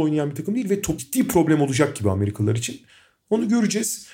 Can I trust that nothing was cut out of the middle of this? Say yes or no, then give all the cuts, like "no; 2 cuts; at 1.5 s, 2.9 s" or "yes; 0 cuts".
no; 1 cut; at 1.0 s